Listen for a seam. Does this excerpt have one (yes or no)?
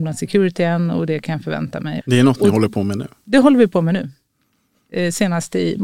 yes